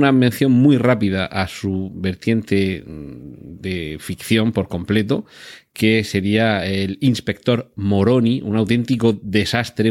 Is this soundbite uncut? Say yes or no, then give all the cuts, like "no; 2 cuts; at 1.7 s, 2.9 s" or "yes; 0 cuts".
yes; 0 cuts